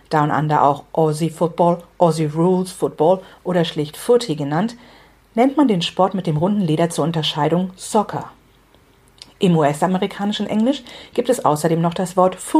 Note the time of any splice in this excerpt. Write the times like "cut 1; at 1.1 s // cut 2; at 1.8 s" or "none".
none